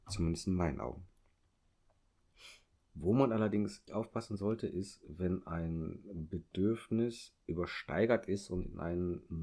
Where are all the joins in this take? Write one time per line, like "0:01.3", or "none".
0:03.9